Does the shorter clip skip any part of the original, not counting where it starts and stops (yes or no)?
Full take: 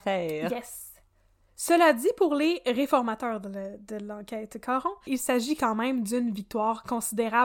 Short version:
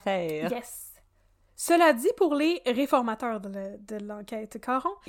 no